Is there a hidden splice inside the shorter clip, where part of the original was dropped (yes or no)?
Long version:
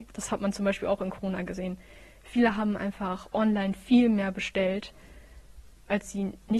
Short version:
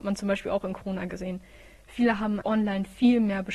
yes